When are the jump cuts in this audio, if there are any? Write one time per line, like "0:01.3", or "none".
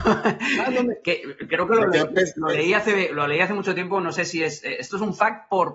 none